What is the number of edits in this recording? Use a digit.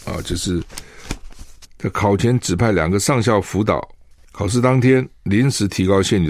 2